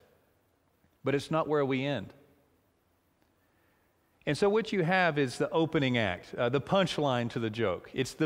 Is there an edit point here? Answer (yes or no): no